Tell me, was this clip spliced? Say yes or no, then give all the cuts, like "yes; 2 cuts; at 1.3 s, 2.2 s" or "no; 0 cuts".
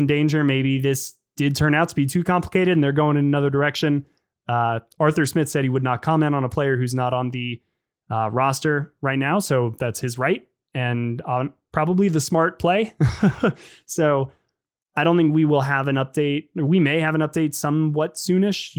no; 0 cuts